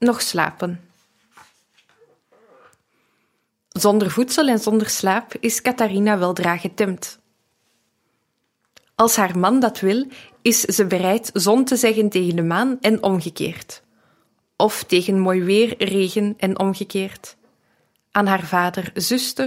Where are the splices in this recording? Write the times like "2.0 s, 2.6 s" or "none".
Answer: none